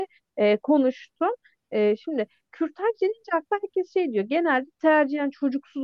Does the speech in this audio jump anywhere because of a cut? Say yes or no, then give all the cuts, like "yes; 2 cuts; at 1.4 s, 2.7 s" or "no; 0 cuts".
no; 0 cuts